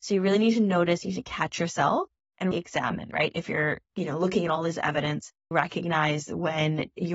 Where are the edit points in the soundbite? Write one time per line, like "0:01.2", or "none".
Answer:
0:02.5
0:03.8
0:05.5